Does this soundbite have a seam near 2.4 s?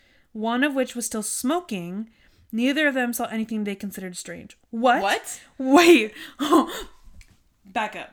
yes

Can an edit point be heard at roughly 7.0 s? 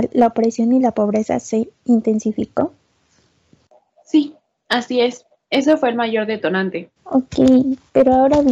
yes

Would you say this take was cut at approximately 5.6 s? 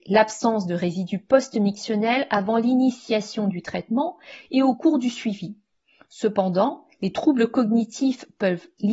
no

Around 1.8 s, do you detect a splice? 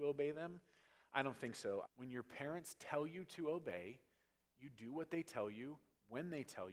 yes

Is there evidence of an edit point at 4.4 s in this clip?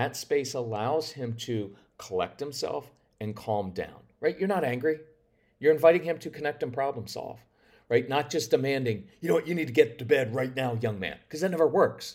no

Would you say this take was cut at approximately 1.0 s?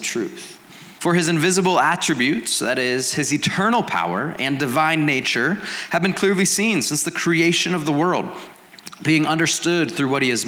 yes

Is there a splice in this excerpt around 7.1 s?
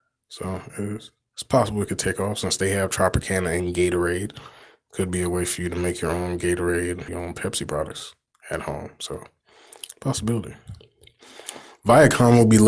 yes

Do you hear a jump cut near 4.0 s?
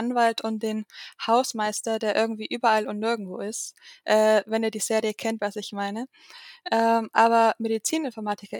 no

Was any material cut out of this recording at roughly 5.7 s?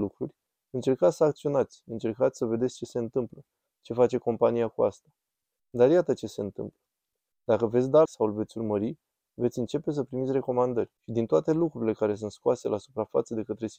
no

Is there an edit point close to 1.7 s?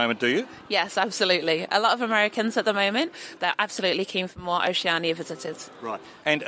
no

